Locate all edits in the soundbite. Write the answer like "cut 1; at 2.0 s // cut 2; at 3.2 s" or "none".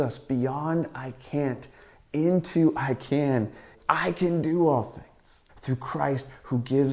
cut 1; at 3.7 s // cut 2; at 5.5 s

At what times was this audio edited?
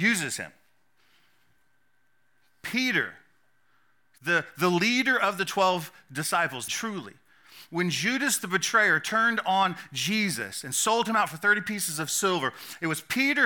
cut 1; at 6.7 s

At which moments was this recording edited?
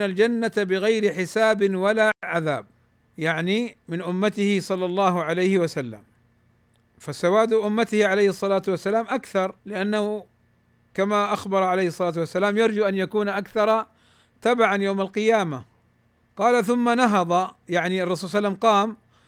cut 1; at 9.6 s

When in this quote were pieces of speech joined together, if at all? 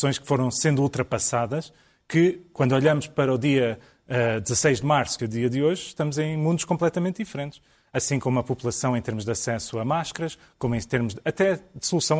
cut 1; at 5.2 s

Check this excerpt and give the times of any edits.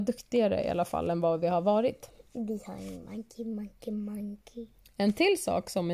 none

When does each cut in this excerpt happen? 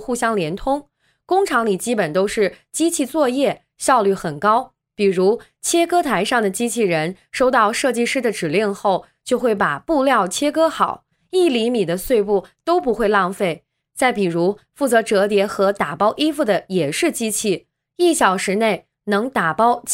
cut 1; at 13.8 s

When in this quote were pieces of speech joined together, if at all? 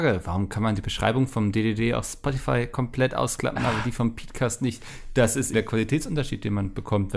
cut 1; at 5.5 s

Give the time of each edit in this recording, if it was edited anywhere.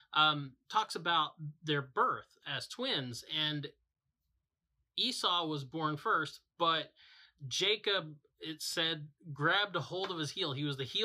none

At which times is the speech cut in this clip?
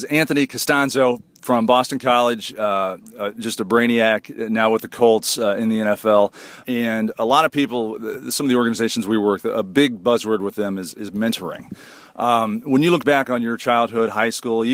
none

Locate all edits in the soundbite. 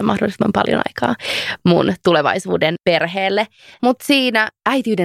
none

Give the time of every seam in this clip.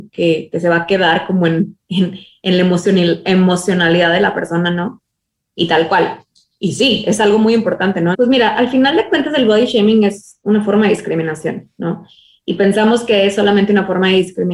cut 1; at 8.1 s

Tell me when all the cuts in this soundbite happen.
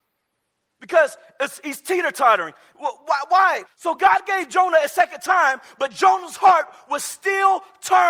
cut 1; at 3.7 s

